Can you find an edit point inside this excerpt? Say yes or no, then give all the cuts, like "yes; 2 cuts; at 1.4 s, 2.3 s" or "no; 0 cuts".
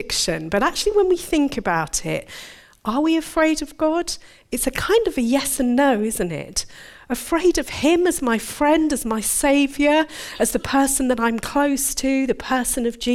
no; 0 cuts